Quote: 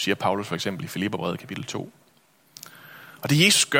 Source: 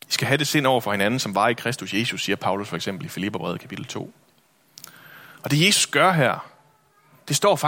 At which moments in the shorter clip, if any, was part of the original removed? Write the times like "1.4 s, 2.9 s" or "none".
none